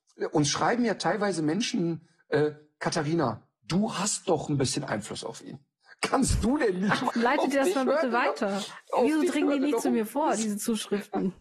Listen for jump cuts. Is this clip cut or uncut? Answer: cut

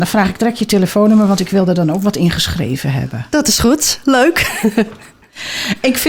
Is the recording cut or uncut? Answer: uncut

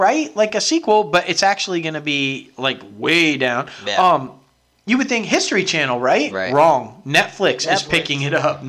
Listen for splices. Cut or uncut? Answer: uncut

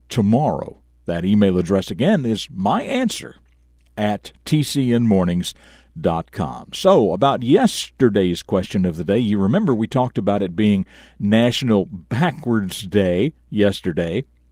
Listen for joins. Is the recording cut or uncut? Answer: uncut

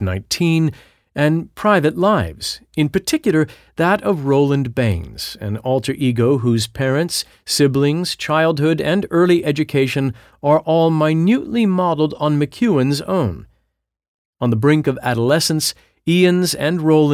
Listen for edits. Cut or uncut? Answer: uncut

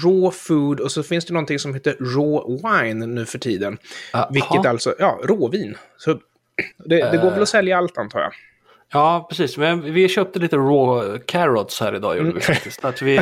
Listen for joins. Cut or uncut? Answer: cut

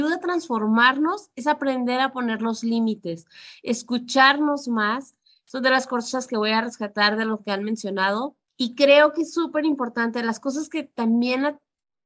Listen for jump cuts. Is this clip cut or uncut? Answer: cut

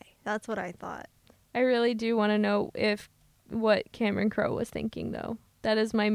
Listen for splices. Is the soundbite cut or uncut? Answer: uncut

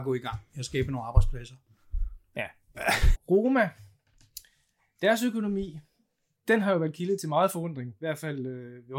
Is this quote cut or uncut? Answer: cut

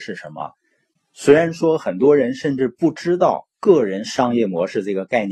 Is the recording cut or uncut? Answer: cut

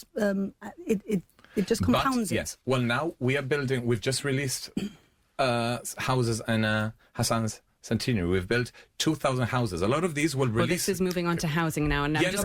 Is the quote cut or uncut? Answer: uncut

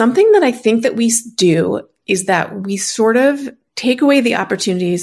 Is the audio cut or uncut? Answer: uncut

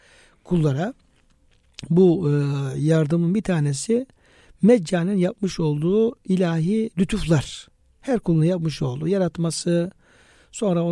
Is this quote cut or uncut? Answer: uncut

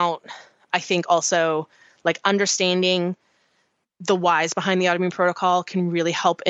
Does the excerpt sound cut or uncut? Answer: uncut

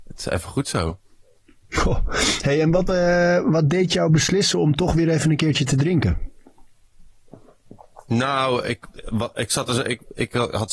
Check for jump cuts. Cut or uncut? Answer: uncut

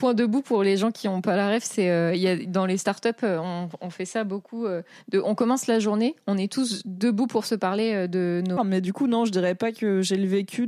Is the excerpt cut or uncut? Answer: cut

